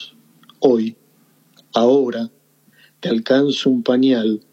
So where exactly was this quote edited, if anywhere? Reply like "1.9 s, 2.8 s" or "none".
none